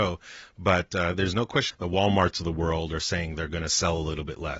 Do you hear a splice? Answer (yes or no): yes